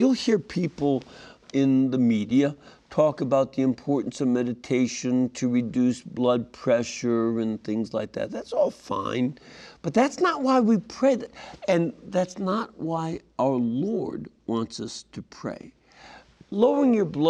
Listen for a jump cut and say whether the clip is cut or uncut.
cut